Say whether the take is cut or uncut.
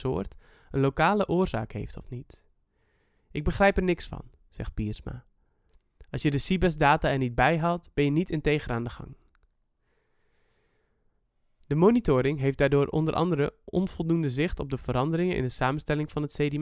uncut